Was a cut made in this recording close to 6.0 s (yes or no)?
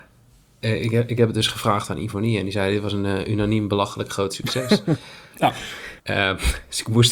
yes